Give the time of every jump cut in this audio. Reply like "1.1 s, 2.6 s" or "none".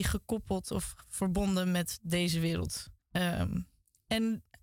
3.0 s